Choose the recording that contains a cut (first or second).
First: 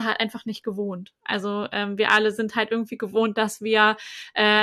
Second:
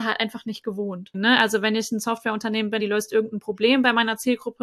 second